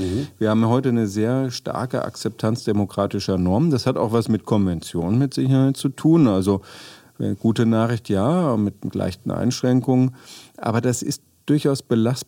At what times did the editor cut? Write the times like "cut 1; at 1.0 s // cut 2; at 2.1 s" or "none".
none